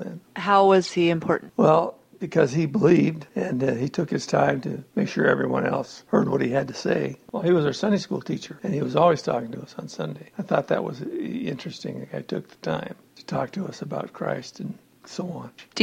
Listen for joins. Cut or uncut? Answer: uncut